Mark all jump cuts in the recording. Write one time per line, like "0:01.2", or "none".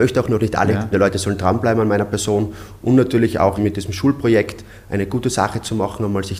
0:00.9
0:03.6